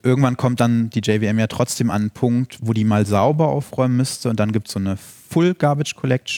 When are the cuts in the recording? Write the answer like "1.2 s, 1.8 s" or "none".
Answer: none

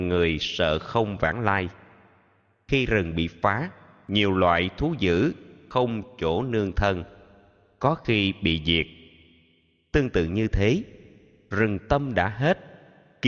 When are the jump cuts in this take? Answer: none

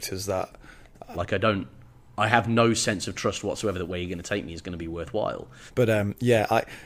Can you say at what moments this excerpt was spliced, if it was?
1.1 s, 5.7 s

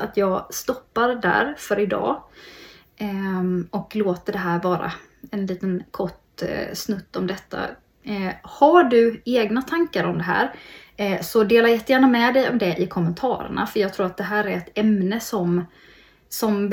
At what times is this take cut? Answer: none

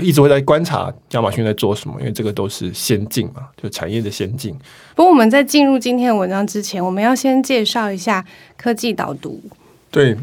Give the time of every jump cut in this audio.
4.9 s

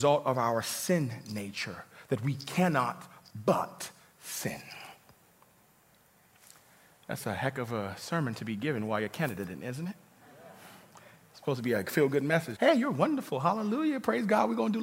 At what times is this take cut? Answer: 12.6 s

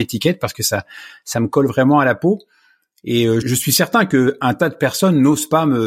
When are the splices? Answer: 3.4 s

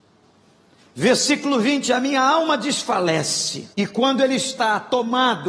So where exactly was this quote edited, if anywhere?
3.7 s

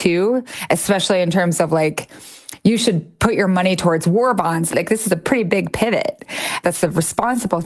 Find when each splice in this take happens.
4.7 s, 6.6 s

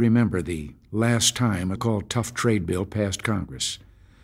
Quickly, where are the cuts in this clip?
1.8 s

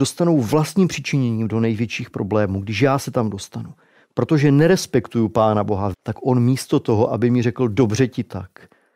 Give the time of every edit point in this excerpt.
5.9 s

